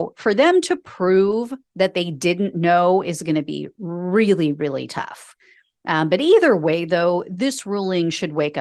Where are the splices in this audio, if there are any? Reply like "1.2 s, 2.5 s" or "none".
1.7 s